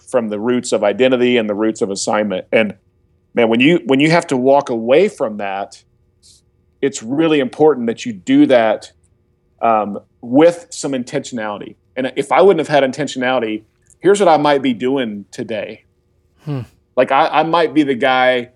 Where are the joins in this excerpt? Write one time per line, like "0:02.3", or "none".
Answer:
0:16.3